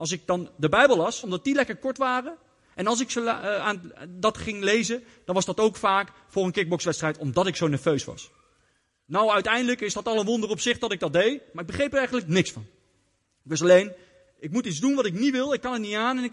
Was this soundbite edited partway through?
yes; 1 cut; at 1.2 s

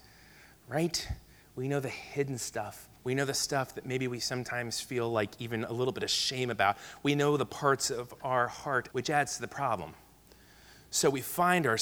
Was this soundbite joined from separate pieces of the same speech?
yes; 2 cuts; at 3.0 s, 8.9 s

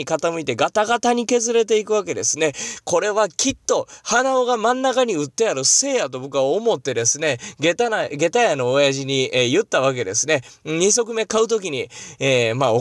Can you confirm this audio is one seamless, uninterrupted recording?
yes; 0 cuts

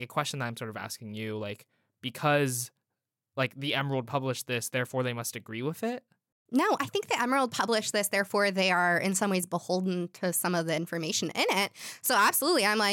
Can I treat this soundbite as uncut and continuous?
yes; 0 cuts

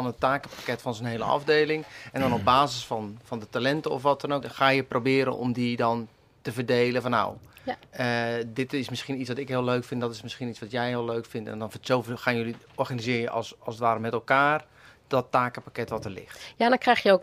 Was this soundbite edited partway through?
yes; 1 cut; at 4.4 s

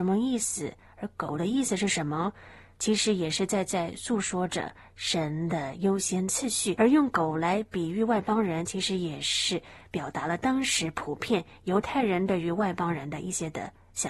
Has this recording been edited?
no; 0 cuts

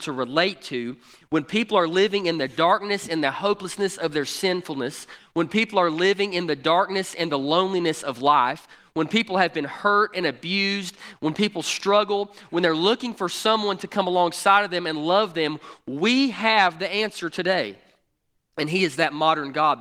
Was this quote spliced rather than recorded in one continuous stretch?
no; 0 cuts

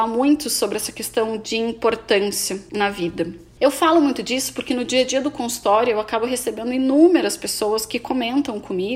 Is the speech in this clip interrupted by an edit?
no; 0 cuts

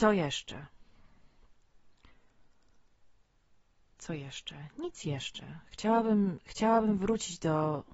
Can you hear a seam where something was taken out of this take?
no; 0 cuts

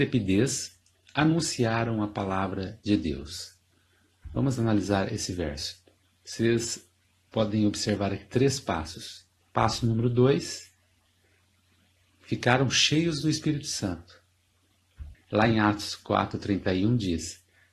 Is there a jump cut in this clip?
yes; 2 cuts; at 9.4 s, 15.1 s

